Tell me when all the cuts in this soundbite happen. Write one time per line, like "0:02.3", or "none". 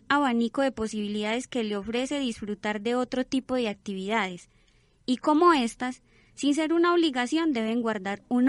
none